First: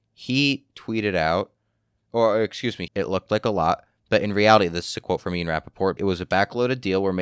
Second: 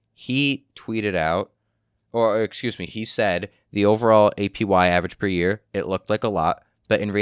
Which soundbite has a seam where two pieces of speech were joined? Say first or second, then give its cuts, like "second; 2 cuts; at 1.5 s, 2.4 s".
first; 2 cuts; at 2.9 s, 6.0 s